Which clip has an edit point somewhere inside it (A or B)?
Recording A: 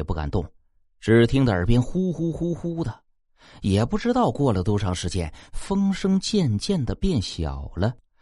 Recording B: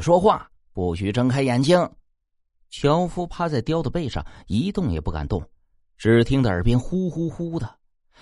B